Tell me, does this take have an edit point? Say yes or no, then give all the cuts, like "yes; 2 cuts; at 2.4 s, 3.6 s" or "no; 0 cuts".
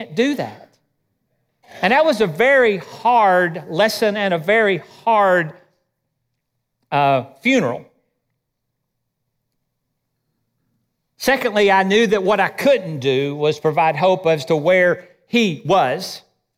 no; 0 cuts